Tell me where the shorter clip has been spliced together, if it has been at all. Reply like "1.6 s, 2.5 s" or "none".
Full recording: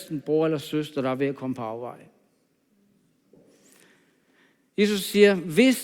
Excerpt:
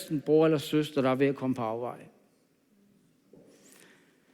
none